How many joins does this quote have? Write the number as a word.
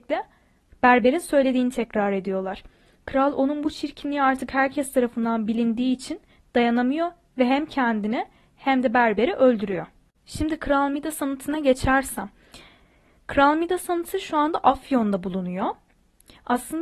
zero